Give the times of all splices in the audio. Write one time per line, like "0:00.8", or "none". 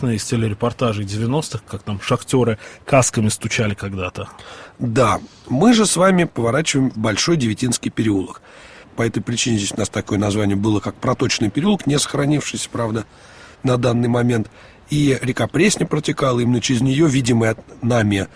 0:08.8